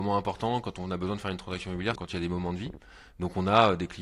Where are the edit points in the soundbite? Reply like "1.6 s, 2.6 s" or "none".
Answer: 1.9 s